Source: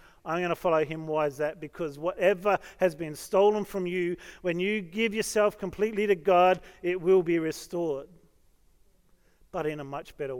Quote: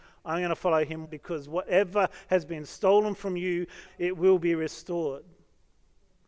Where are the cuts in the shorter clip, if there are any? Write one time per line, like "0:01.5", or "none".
0:01.0
0:03.9